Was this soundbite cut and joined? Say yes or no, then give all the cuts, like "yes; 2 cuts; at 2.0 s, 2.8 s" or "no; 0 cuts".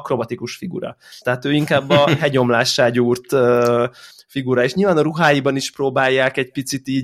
yes; 1 cut; at 1.2 s